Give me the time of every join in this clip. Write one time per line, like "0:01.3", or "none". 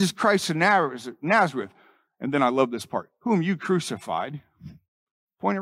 none